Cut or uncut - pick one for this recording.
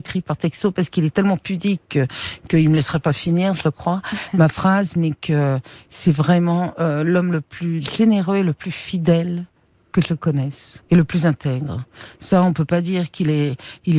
uncut